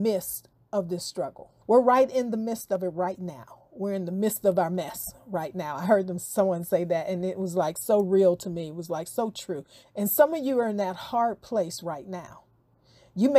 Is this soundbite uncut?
no; 2 cuts; at 1.6 s, 9.8 s

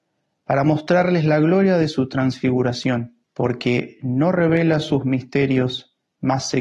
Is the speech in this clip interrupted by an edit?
yes; 1 cut; at 3.2 s

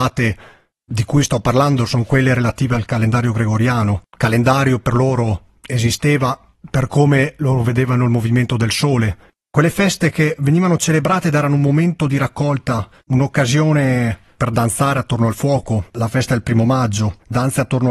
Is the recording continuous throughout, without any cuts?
no; 3 cuts; at 9.3 s, 14.4 s, 15.9 s

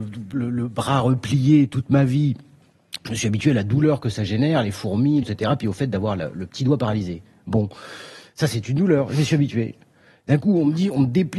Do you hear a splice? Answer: yes; 1 cut; at 5.2 s

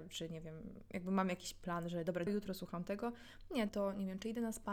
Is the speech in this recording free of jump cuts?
no; 2 cuts; at 2.3 s, 3.7 s

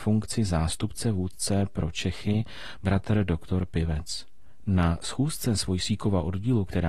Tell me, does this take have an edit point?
yes; 1 cut; at 4.6 s

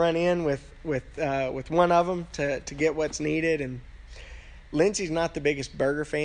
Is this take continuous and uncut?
yes; 0 cuts

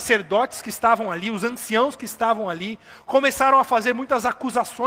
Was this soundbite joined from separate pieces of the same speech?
no; 0 cuts

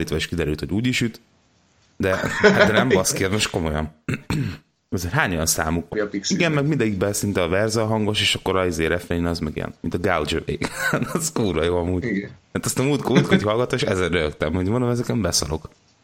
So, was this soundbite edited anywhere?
yes; 1 cut; at 5.9 s

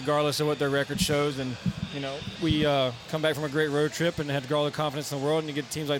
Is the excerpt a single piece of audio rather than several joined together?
yes; 0 cuts

